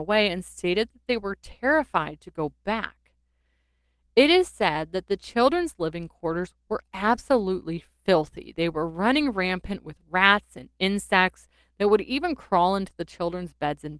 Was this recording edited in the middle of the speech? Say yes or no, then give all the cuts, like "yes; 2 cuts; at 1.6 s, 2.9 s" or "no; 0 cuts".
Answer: no; 0 cuts